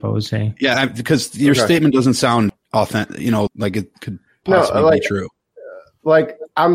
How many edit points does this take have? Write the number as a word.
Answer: one